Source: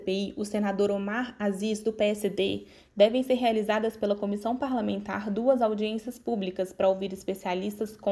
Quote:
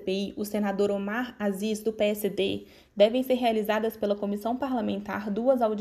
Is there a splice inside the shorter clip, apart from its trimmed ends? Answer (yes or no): no